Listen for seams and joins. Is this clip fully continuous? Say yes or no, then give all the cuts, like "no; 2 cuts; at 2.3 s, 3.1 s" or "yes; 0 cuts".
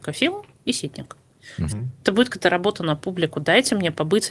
no; 1 cut; at 1.7 s